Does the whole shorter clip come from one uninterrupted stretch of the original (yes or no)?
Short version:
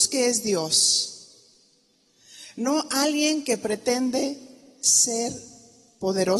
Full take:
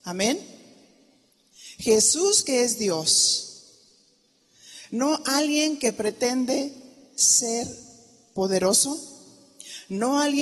yes